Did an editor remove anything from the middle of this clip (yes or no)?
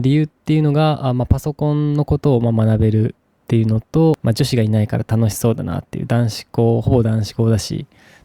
no